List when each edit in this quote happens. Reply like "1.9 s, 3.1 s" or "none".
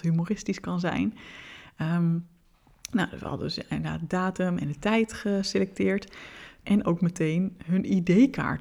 6.6 s